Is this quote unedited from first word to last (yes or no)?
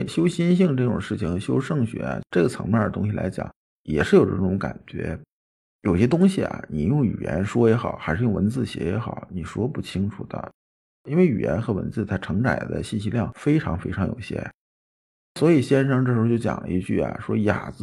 no